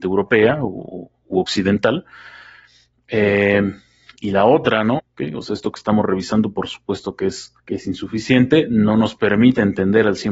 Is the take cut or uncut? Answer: cut